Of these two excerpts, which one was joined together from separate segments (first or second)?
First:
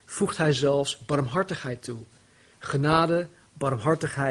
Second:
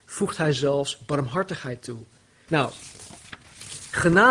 second